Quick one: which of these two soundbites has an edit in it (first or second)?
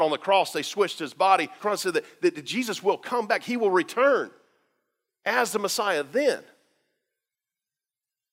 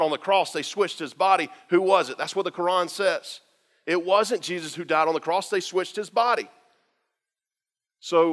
first